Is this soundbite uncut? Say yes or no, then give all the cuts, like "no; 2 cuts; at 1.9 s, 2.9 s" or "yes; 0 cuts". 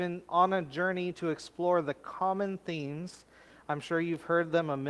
yes; 0 cuts